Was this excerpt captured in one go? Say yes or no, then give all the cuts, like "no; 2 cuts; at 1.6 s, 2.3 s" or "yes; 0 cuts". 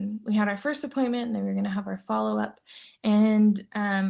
yes; 0 cuts